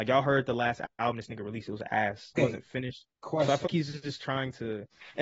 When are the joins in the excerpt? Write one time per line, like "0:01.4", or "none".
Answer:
0:02.3
0:03.6